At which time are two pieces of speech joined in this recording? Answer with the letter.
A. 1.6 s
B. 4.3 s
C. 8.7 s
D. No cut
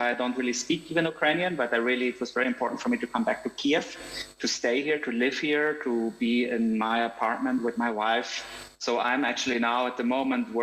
C